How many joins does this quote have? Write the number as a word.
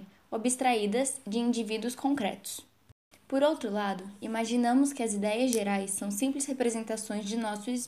one